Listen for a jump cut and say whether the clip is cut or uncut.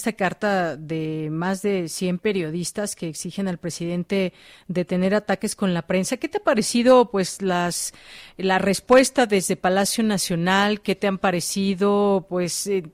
uncut